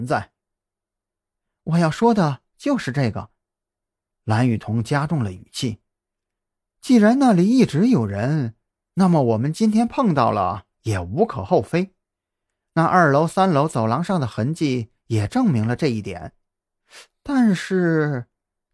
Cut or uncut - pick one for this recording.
uncut